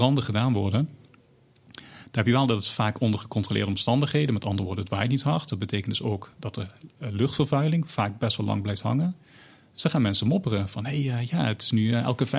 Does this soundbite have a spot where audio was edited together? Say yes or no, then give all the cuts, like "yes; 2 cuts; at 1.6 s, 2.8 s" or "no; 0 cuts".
no; 0 cuts